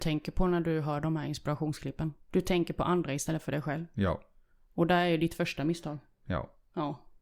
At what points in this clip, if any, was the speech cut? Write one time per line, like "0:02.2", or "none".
0:02.2